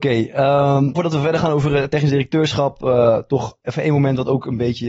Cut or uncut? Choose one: cut